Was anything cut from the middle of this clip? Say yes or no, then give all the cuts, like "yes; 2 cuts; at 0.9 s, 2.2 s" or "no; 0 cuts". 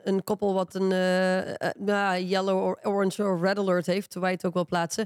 no; 0 cuts